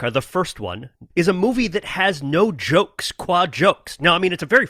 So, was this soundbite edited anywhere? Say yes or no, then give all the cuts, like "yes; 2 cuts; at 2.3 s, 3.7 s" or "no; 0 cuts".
yes; 1 cut; at 1.1 s